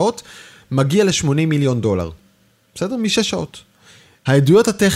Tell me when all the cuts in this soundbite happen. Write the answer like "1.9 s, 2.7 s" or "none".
none